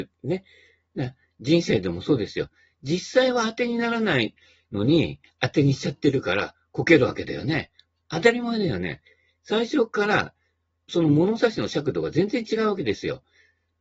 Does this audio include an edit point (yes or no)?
no